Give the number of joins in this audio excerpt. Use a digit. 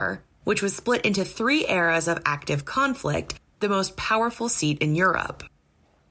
1